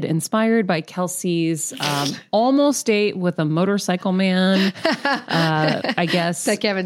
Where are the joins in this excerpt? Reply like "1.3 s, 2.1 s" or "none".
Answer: none